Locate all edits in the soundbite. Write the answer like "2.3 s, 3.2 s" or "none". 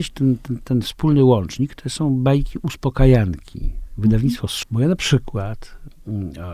4.6 s